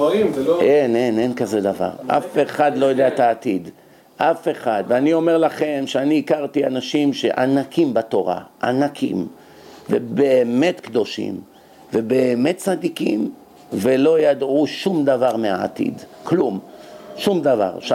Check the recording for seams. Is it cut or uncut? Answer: uncut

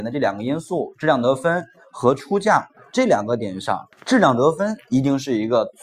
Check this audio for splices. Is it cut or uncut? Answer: cut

